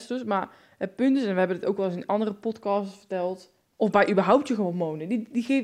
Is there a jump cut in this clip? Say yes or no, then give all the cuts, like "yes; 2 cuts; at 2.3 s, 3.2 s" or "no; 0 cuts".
yes; 1 cut; at 3.7 s